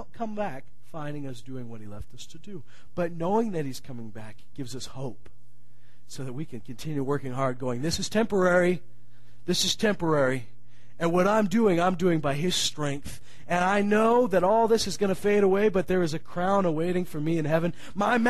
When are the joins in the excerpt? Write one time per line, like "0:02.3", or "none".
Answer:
none